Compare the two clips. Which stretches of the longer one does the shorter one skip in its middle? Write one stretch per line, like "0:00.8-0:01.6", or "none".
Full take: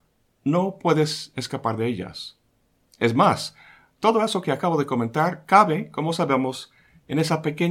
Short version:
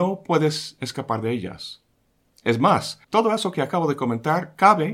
0:03.6-0:03.9